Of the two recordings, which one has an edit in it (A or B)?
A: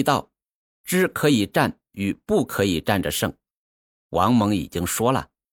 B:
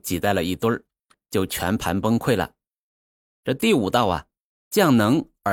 B